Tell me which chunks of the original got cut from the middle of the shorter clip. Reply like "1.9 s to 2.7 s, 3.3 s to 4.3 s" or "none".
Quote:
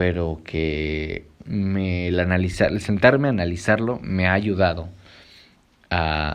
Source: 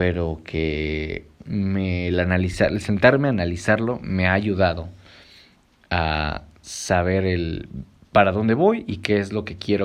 none